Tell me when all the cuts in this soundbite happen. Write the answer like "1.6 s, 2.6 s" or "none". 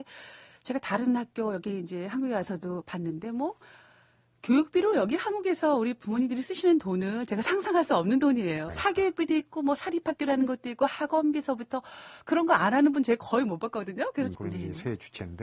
8.7 s, 14.3 s